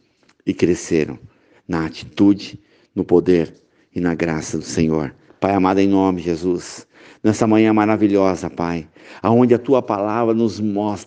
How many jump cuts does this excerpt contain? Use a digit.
1